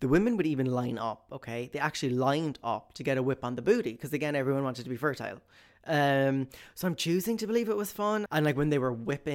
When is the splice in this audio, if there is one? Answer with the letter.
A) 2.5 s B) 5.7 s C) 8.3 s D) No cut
C